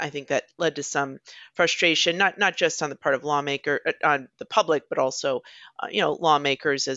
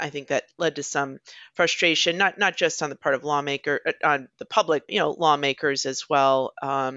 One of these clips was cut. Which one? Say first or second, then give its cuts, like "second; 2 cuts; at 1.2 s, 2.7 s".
second; 1 cut; at 4.9 s